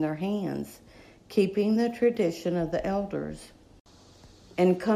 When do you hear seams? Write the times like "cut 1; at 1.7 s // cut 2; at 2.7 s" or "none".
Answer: none